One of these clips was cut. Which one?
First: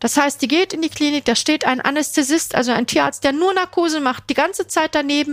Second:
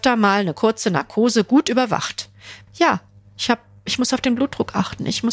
second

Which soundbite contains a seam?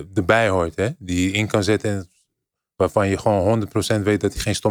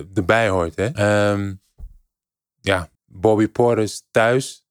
second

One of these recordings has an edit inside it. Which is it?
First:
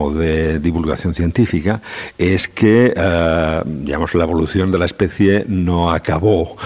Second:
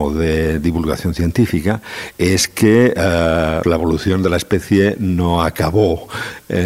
second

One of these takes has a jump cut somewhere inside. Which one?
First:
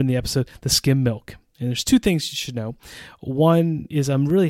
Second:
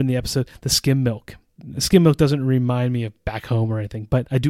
first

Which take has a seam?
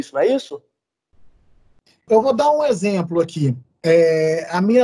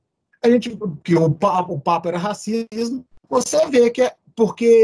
first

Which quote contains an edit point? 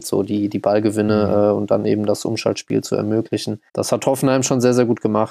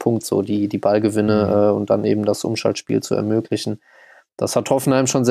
first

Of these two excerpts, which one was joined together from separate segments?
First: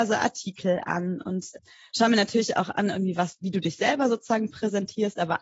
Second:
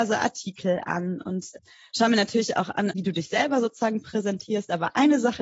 second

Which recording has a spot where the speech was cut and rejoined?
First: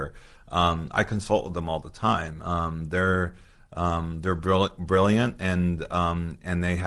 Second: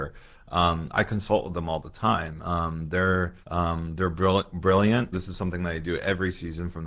second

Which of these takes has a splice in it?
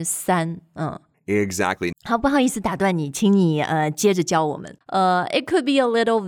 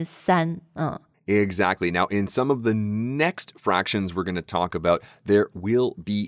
first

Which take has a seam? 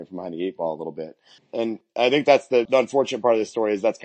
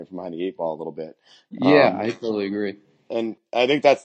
first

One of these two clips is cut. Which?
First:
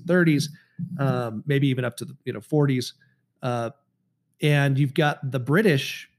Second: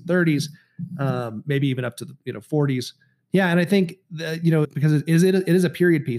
second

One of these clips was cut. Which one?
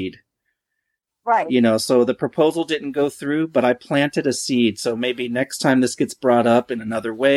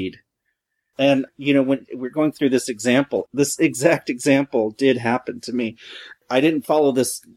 second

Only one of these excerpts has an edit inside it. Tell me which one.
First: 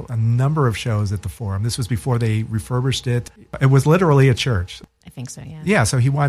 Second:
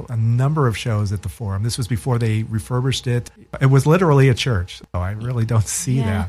second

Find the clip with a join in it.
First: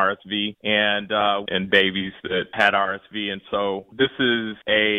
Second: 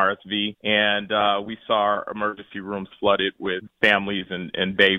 first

